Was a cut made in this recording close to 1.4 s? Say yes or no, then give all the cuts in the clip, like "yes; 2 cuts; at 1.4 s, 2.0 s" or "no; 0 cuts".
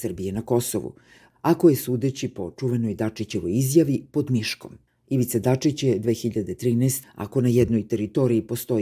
no; 2 cuts; at 4.9 s, 7.0 s